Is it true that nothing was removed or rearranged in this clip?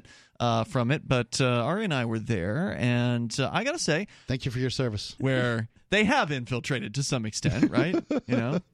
no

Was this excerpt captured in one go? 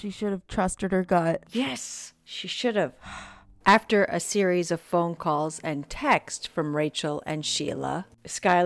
yes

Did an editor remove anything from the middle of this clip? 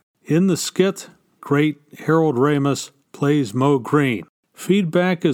yes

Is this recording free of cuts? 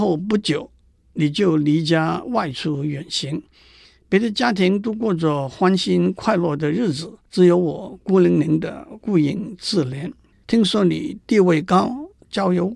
no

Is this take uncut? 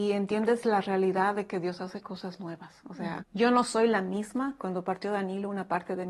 no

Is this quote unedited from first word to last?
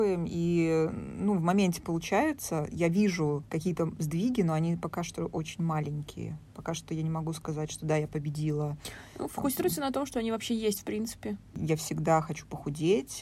no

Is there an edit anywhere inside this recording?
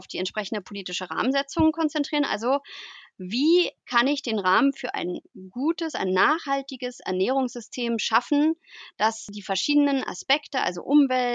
no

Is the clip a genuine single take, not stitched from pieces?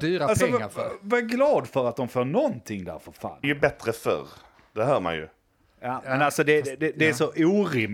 no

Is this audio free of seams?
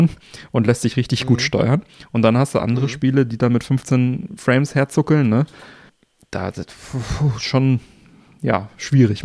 yes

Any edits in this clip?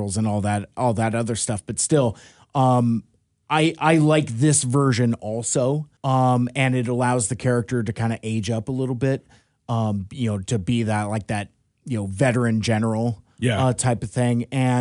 yes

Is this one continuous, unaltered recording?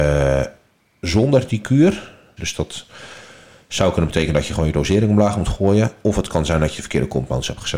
no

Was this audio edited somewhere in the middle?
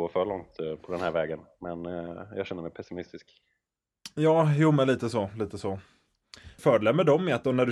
yes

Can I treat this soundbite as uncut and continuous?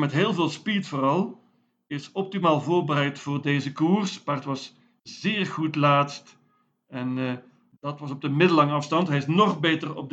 yes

